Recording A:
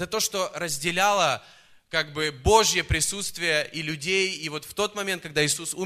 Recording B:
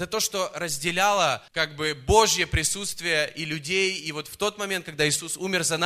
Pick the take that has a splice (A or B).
B